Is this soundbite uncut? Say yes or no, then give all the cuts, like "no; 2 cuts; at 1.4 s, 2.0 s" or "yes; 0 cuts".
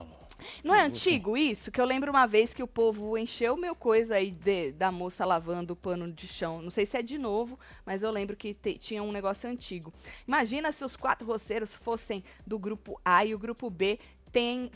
yes; 0 cuts